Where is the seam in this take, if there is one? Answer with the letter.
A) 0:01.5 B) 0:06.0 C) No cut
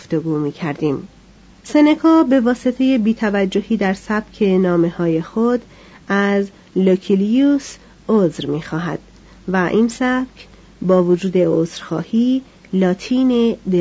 A